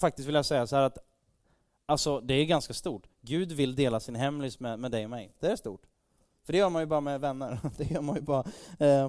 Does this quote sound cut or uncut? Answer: uncut